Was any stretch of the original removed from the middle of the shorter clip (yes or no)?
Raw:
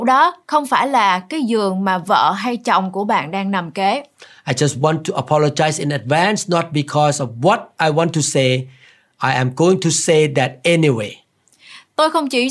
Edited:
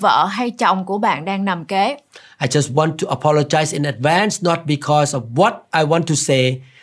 no